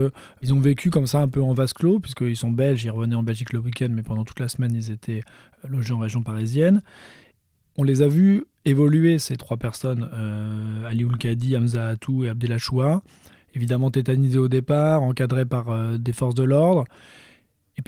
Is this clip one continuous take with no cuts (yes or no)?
yes